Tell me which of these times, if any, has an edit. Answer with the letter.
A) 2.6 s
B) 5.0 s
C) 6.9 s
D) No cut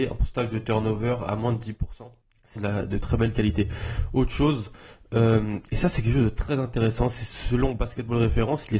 A